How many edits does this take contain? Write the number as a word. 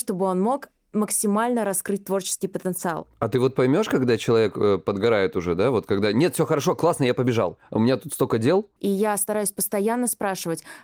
one